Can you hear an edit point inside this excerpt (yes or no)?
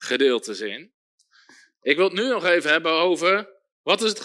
no